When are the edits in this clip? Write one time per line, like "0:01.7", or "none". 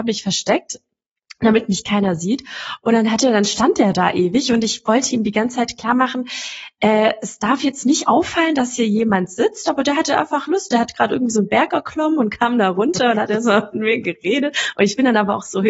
none

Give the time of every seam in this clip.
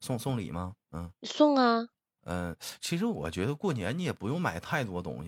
0:01.2

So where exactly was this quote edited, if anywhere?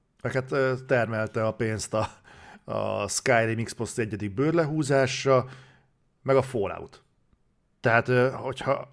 0:07.7

